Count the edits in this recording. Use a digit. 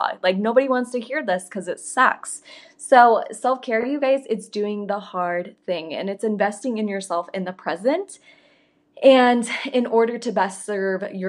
0